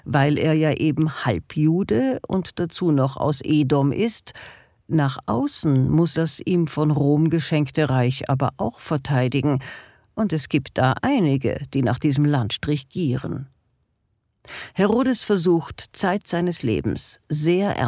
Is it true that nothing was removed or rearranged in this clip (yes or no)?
no